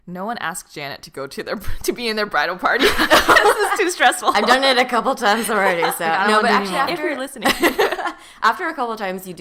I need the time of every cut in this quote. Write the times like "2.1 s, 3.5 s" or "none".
none